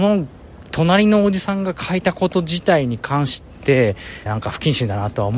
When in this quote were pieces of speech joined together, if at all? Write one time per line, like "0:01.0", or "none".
0:04.3